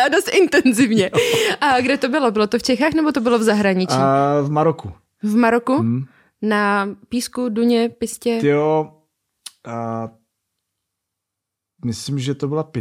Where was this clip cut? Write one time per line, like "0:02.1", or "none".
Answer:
none